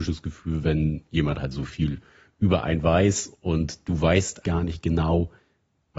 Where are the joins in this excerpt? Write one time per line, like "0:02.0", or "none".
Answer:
0:04.4